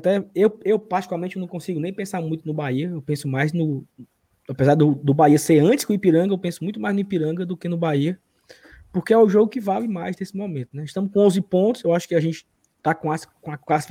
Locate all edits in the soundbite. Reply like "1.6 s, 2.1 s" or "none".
none